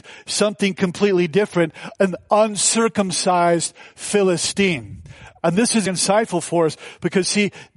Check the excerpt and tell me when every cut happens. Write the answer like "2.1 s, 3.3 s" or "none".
5.9 s